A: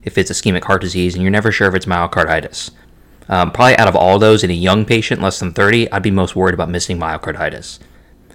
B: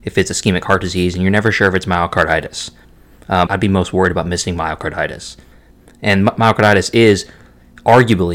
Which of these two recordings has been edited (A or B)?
B